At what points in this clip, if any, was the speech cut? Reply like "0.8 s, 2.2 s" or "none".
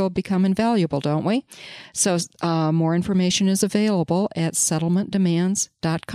none

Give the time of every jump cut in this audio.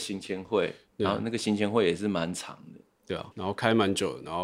3.3 s

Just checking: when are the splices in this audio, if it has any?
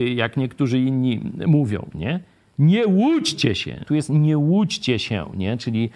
3.8 s

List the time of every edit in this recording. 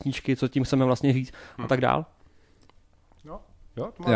none

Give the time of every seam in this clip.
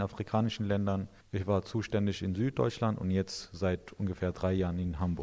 none

